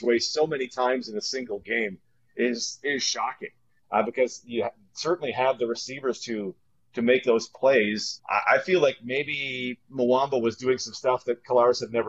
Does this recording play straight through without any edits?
no; 1 cut; at 8.2 s

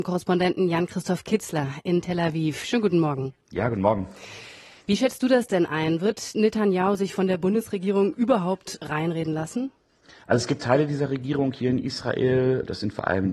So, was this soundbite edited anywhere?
yes; 1 cut; at 3.4 s

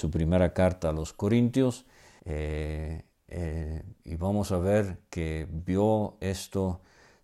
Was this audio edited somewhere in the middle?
yes; 1 cut; at 2.2 s

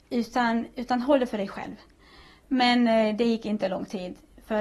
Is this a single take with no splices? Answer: no; 1 cut; at 2.4 s

